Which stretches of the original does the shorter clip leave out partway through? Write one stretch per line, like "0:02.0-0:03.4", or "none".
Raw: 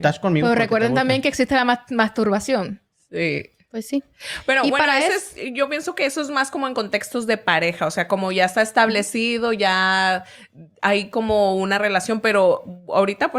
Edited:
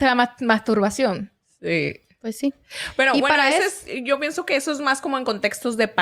none